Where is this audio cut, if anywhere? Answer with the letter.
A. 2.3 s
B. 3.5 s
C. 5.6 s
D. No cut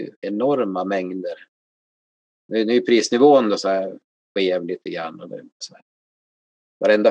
C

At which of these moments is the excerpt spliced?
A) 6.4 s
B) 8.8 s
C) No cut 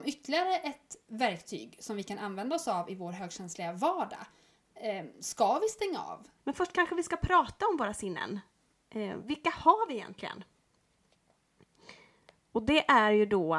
A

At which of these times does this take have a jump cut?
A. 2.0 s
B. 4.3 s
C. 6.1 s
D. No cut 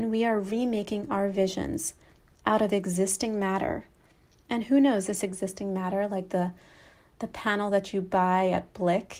D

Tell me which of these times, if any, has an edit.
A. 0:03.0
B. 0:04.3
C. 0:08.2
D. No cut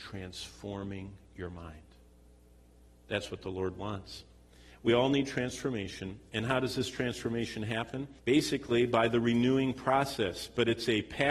C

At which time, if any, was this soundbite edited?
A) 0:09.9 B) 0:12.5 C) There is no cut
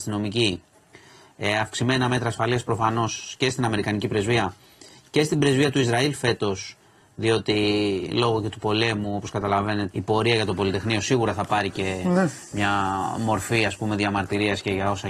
A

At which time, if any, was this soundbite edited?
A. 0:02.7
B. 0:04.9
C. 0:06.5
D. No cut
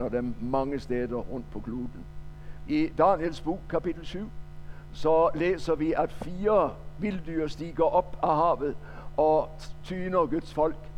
A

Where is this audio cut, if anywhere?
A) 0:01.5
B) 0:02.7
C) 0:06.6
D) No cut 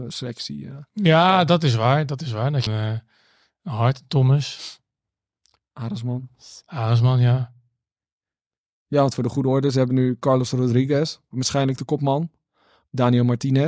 B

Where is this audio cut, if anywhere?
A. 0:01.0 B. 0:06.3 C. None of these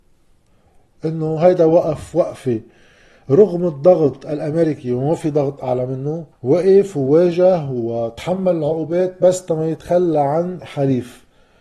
B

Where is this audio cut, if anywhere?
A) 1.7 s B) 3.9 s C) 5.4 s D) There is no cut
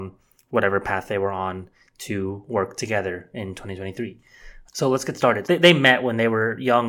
C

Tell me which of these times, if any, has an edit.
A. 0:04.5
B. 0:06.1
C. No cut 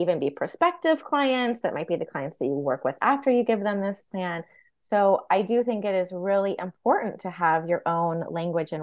C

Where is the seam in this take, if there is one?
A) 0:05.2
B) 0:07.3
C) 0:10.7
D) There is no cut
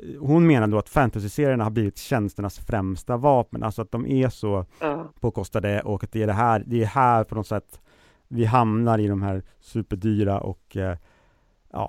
A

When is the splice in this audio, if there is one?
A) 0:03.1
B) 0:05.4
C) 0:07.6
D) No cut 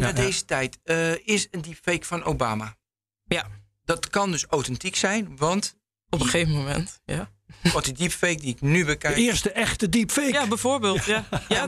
D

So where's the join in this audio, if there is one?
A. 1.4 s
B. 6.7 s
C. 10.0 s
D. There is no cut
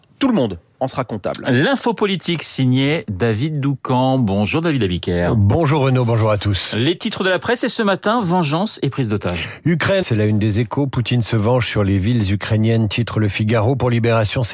C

